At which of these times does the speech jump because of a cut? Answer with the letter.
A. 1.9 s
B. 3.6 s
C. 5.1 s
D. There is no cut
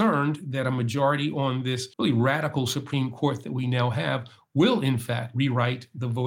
A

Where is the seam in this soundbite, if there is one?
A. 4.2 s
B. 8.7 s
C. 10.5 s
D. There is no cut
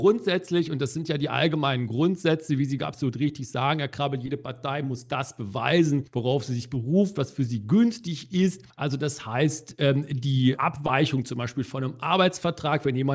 C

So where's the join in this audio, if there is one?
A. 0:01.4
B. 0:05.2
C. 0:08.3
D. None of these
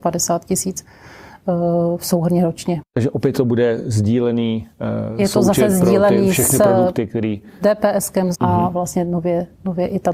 C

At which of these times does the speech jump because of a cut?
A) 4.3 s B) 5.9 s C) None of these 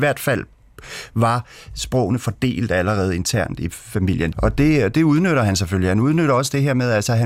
A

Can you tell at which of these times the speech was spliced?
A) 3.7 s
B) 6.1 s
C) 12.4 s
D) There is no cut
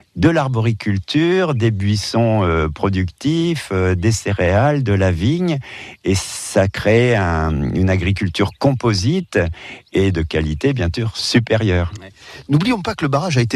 D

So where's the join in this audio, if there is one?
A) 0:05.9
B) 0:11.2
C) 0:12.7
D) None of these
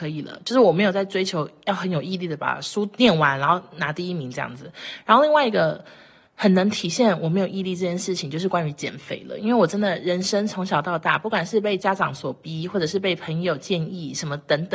D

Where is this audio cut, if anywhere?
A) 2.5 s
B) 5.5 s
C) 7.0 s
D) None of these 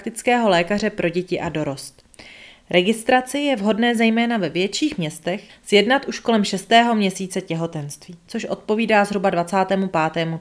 B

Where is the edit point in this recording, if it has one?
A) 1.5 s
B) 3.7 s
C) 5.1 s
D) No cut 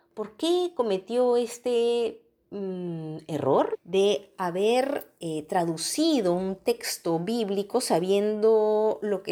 B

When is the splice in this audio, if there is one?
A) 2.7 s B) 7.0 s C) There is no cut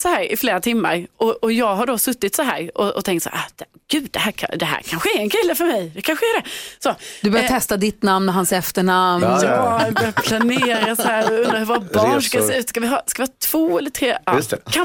C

